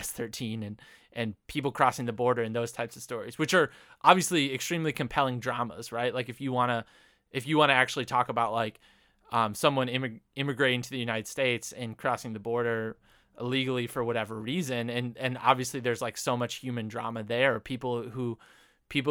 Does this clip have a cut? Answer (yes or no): no